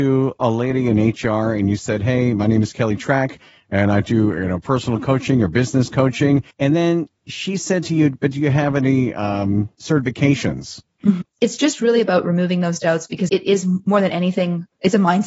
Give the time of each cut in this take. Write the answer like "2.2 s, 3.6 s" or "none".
6.5 s, 11.2 s, 13.3 s